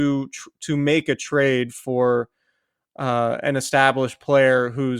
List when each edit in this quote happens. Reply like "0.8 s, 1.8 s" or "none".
none